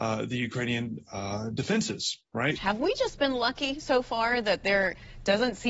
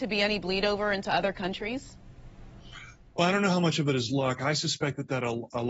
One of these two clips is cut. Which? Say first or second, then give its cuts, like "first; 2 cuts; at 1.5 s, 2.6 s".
first; 1 cut; at 2.5 s